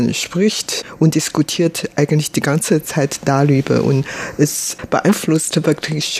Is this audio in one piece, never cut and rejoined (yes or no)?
yes